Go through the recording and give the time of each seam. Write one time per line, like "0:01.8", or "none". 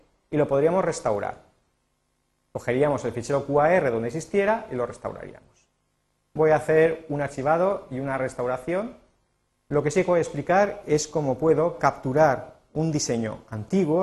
0:09.5